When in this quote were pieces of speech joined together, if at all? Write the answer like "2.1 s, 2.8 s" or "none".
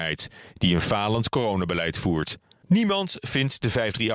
2.6 s